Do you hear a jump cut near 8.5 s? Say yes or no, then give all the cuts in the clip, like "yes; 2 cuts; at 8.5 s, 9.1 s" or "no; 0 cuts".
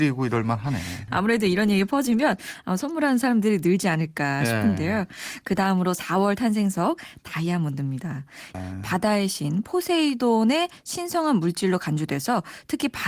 yes; 2 cuts; at 1.1 s, 8.5 s